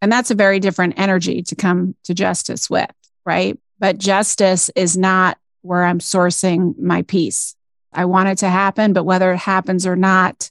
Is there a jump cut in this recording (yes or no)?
yes